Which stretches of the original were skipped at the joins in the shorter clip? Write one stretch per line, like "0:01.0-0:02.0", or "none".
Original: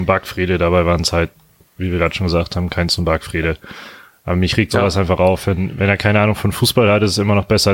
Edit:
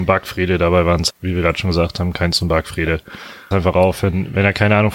0:01.1-0:01.7
0:04.1-0:04.9